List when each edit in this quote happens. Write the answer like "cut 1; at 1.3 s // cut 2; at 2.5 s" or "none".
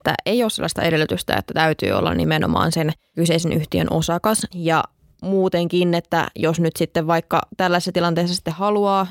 cut 1; at 4.5 s